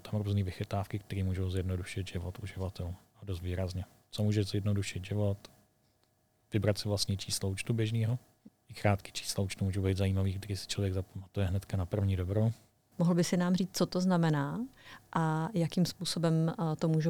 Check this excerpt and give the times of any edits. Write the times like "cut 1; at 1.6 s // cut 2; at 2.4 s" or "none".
cut 1; at 8.5 s // cut 2; at 12.9 s